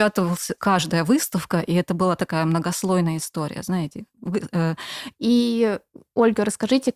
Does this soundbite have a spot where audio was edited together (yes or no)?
yes